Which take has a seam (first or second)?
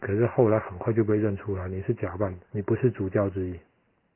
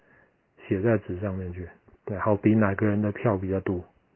first